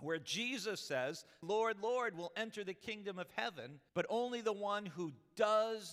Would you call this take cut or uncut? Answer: cut